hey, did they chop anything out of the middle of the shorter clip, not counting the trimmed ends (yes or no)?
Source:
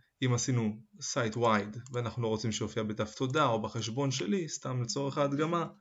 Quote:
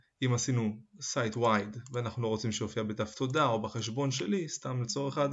no